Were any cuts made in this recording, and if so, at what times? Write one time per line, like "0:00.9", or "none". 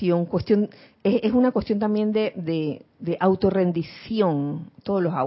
none

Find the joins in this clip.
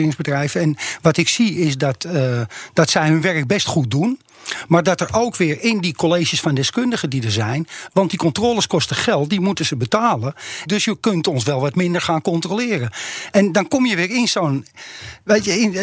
0:07.9
0:10.7

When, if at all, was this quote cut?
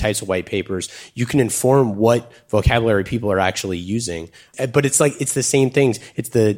none

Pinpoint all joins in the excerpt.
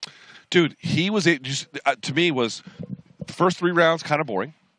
0:01.9

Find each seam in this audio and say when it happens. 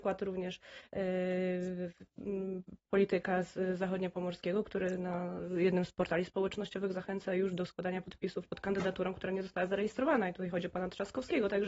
none

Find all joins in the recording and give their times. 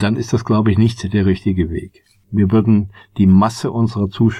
0:02.2

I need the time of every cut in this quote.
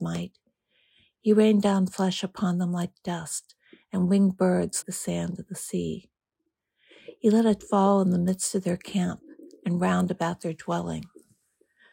0:04.8

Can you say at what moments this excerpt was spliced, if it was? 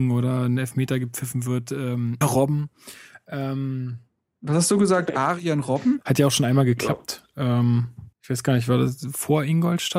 0:02.2
0:06.0
0:08.1

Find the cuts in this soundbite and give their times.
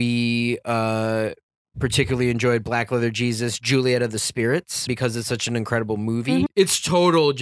0:04.9
0:06.5

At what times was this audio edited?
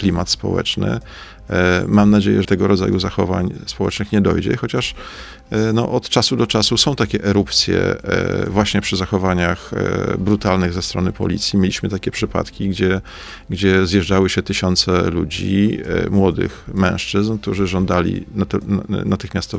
0:02.4

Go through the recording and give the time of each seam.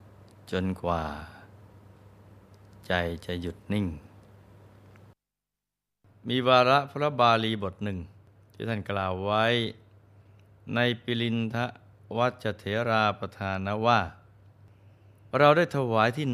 0:15.3

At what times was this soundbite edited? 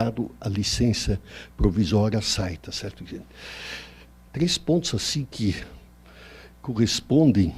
0:04.3

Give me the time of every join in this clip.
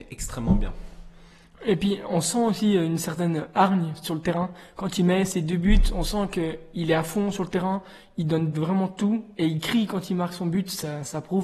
none

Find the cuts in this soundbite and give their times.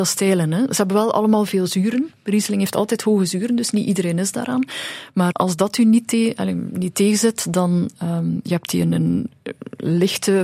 0:05.3

